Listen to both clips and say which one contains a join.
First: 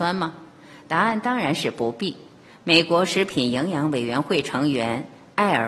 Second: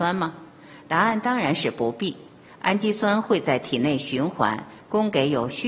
first; 1 cut; at 2.5 s

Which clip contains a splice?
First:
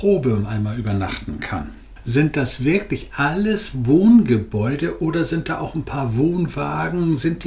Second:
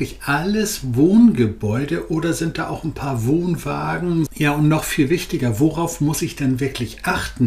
second; 1 cut; at 4.3 s

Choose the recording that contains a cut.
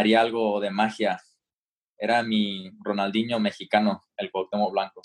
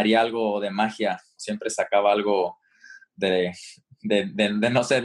second; 1 cut; at 1.4 s

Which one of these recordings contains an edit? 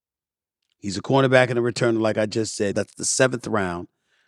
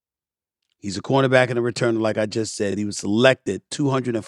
first; 1 cut; at 2.7 s

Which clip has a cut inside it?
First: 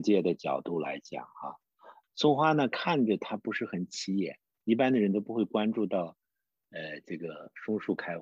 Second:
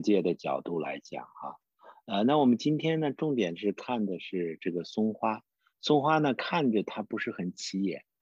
first; 1 cut; at 2.0 s

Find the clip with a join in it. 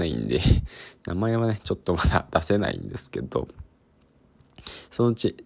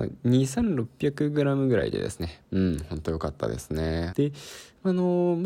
second; 2 cuts; at 2.4 s, 4.1 s

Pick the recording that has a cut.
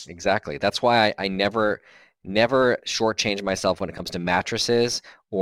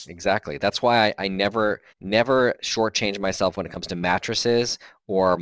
second; 1 cut; at 1.9 s

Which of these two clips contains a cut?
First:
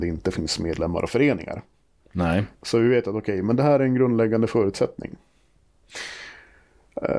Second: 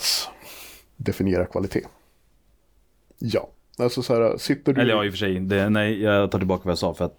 second; 1 cut; at 3.1 s

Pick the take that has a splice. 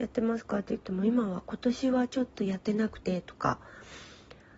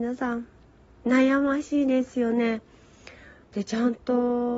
second; 1 cut; at 3.4 s

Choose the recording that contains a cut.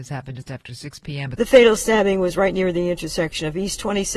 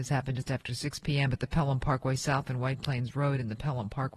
first; 1 cut; at 1.3 s

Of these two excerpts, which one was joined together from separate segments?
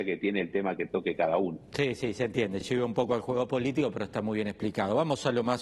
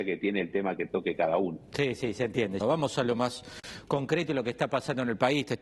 second; 1 cut; at 2.6 s

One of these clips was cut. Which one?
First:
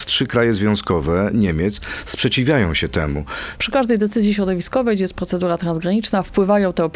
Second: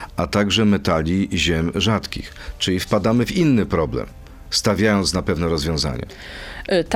first; 1 cut; at 3.6 s

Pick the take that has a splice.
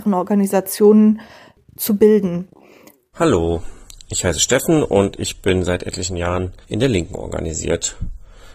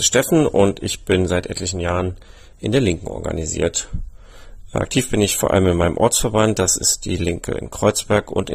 first; 2 cuts; at 3.1 s, 6.6 s

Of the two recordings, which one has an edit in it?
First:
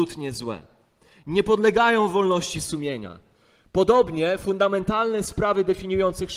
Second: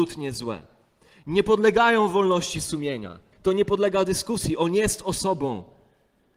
second; 1 cut; at 3.3 s

